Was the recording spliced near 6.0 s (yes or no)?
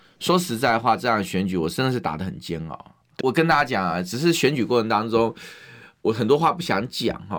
no